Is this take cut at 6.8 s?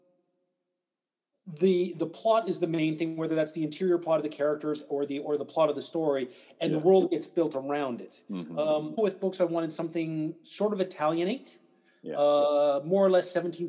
no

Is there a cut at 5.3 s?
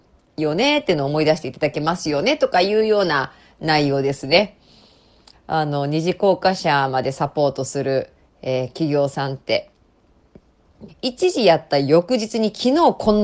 yes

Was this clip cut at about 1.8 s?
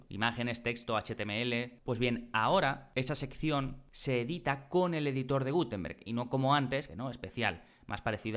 no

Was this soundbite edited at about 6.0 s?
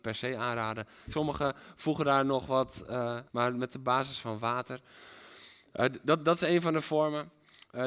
no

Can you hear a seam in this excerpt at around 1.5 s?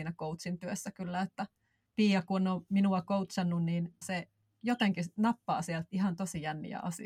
no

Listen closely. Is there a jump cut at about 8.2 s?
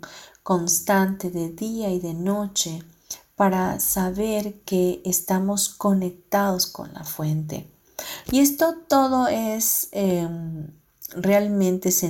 yes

